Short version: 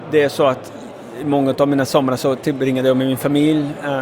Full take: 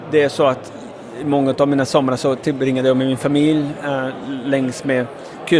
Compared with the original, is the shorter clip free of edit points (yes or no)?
yes